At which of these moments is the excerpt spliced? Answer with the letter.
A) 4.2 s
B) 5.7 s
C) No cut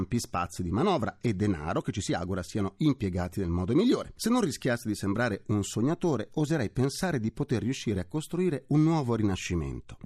C